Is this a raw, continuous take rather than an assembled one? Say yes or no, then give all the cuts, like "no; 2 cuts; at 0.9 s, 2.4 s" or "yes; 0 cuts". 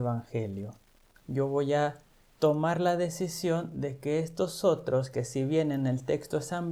no; 1 cut; at 1.2 s